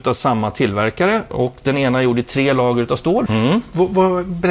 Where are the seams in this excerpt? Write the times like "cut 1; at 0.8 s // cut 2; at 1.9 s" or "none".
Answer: cut 1; at 3.3 s